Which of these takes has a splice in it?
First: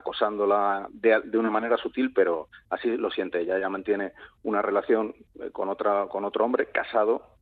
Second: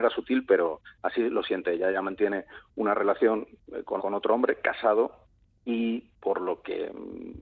second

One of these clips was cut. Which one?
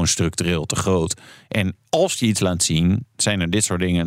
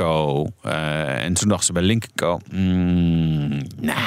first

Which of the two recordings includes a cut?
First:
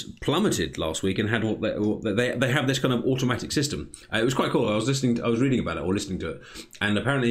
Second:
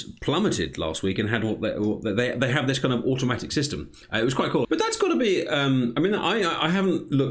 second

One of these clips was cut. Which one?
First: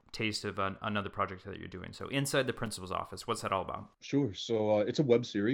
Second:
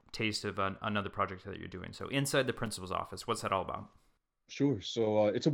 first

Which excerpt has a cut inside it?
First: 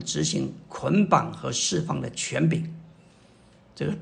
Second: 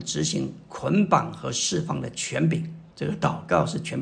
second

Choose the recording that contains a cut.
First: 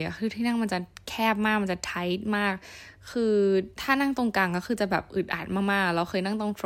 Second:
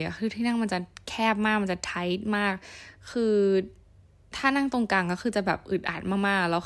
first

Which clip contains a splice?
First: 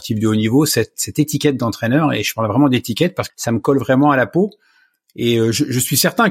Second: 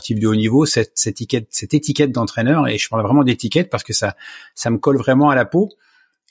first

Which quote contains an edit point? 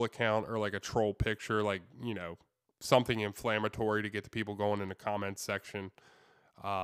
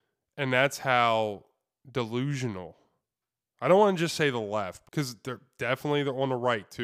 second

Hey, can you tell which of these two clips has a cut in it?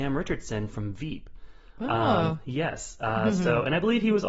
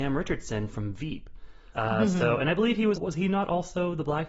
second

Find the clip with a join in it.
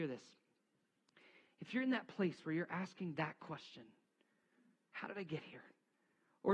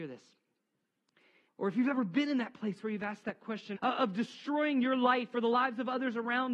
second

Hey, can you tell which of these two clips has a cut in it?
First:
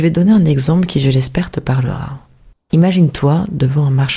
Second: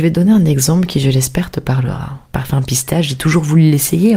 second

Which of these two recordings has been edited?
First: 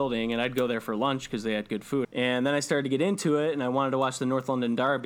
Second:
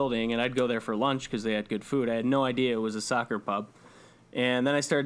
first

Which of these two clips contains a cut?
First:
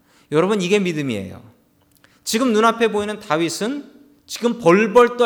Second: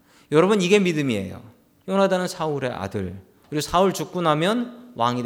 second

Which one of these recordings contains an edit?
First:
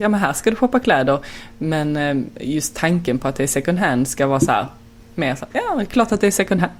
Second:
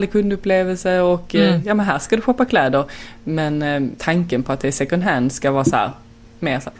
second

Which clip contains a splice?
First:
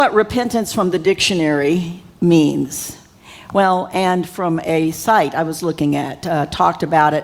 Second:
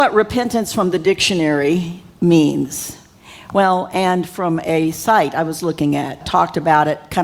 second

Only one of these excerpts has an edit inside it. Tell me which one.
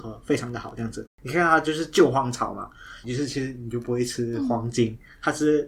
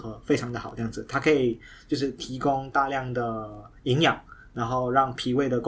first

